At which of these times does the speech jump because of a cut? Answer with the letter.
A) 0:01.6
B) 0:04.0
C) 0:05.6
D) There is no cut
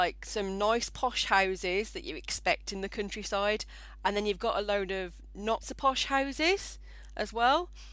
C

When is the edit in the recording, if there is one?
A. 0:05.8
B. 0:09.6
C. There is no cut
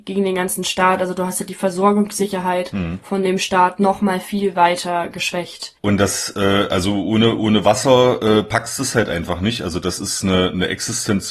A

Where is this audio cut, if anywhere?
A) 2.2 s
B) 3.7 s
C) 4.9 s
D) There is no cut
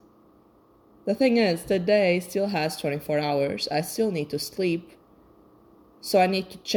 D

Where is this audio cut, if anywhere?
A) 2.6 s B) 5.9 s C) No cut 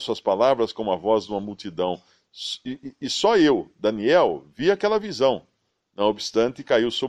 B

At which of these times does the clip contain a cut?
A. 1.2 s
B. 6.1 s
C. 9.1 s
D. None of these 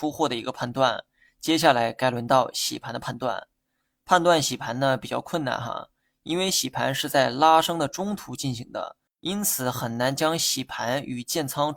C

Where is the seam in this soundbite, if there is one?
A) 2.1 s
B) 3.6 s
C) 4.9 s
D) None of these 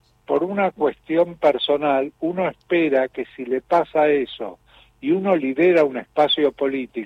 D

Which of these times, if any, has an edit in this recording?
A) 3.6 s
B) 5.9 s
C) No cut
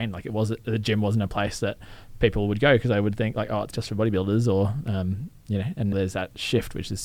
B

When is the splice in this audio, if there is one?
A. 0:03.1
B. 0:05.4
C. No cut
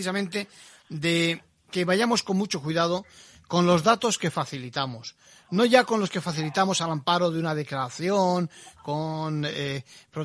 C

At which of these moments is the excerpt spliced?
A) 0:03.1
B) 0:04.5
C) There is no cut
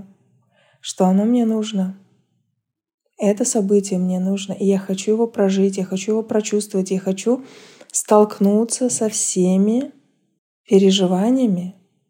C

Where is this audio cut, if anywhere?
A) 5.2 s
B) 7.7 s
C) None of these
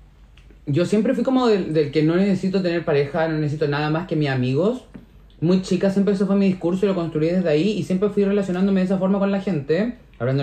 C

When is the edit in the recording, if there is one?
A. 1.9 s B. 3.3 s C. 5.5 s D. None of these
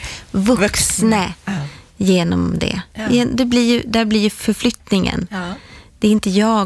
D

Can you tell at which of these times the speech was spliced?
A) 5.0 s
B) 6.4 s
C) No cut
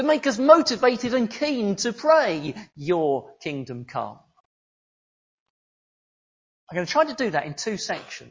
C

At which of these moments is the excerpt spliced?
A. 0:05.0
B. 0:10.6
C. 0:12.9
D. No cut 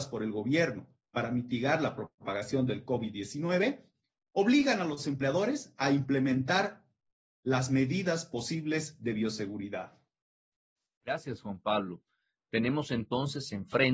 A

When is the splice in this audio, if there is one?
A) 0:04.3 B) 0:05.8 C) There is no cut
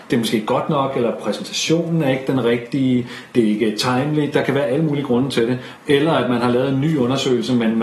B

